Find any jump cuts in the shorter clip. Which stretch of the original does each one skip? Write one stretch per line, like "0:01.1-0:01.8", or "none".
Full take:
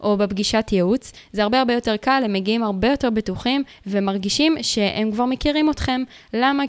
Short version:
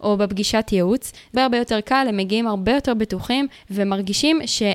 0:01.3-0:01.5